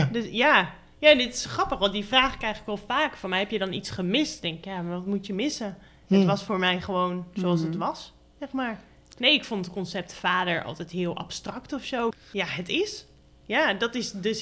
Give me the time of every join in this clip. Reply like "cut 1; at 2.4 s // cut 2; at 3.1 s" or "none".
cut 1; at 12.1 s